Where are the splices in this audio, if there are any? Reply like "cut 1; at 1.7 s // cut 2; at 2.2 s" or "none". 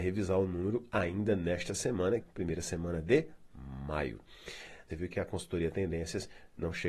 cut 1; at 2.2 s // cut 2; at 4.9 s